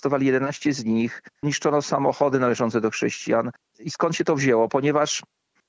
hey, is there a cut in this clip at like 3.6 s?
no; 0 cuts

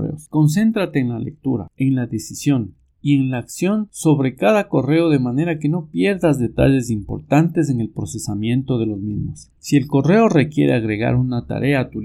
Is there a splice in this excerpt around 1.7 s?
no; 1 cut; at 9.5 s

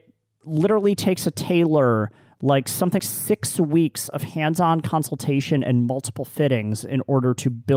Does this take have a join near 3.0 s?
yes; 1 cut; at 3.0 s

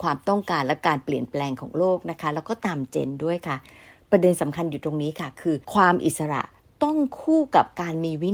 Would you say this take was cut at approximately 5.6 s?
yes; 1 cut; at 5.6 s

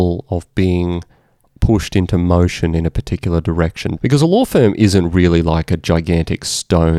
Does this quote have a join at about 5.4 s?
no; 1 cut; at 4.0 s

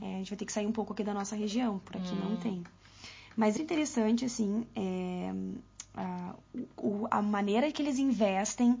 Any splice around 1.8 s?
no; 1 cut; at 3.6 s

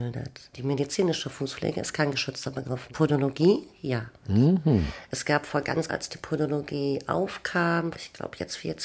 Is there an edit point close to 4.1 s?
no; 2 cuts; at 5.9 s, 7.9 s

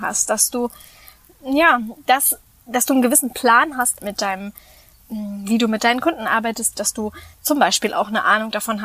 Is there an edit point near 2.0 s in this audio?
no; 2 cuts; at 4.0 s, 6.7 s

